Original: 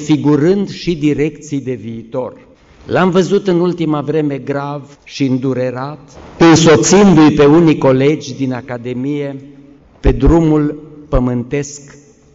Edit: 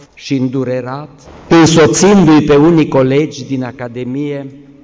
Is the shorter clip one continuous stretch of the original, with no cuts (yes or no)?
yes